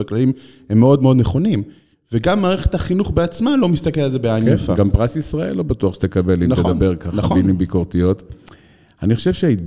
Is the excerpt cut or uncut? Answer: cut